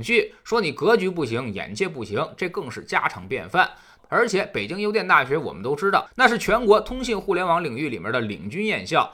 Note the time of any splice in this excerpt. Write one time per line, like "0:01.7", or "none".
0:04.0